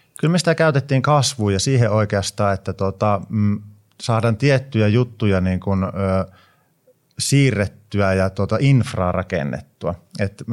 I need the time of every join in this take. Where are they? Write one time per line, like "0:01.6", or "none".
none